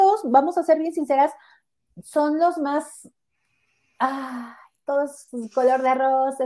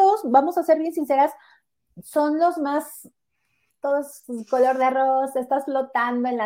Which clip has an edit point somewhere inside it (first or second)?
second